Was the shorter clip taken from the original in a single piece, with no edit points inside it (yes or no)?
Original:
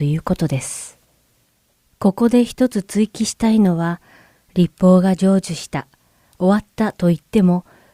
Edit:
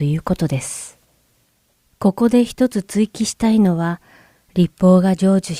yes